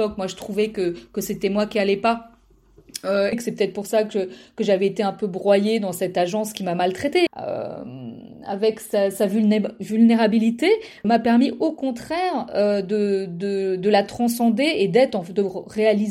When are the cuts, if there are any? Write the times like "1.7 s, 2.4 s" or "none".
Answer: 3.3 s, 7.3 s, 11.0 s